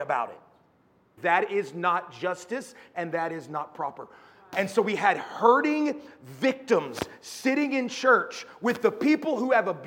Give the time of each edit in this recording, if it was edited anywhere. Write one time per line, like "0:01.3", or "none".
0:01.2
0:04.5